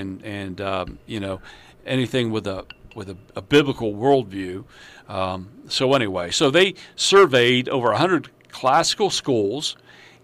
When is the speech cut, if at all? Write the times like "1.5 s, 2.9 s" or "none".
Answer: none